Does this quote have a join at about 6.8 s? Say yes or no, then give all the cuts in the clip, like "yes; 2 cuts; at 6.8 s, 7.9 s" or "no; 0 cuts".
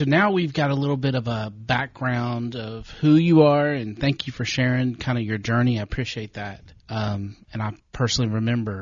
yes; 1 cut; at 6.8 s